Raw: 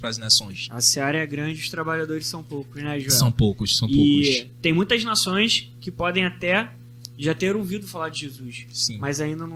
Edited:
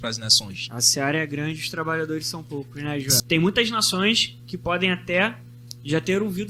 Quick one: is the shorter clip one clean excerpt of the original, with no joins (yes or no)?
no